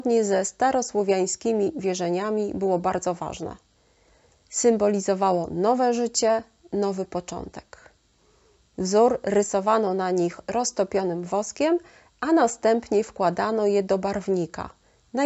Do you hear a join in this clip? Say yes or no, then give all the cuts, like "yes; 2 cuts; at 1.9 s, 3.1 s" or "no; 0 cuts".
yes; 1 cut; at 8.7 s